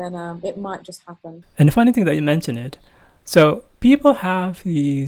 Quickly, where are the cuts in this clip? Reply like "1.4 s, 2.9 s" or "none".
1.4 s, 3.7 s